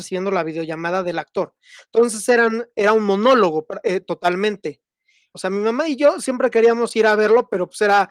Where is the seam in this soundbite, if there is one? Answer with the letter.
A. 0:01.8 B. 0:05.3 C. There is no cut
B